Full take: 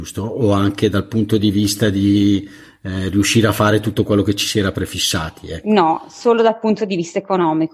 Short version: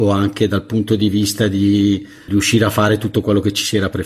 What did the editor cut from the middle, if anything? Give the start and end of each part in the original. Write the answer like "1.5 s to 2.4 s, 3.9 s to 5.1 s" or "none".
2.7 s to 3.1 s